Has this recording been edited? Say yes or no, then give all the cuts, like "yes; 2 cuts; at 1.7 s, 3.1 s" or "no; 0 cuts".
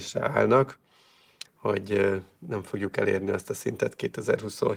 yes; 1 cut; at 1.4 s